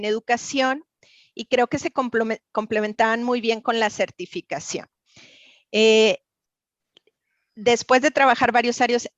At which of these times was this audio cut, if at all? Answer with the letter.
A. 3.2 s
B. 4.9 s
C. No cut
C